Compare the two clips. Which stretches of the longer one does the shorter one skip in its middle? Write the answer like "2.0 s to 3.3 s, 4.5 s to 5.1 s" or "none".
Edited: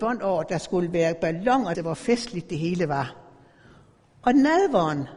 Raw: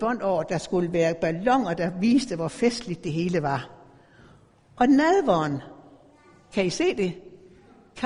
1.7 s to 2.3 s